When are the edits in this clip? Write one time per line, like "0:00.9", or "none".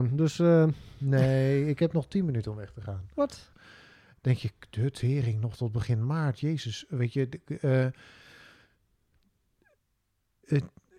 0:03.5